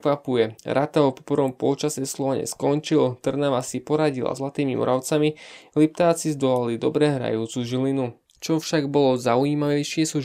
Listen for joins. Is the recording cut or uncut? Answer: cut